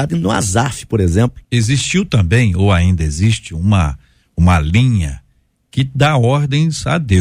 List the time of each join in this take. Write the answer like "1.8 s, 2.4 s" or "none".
1.4 s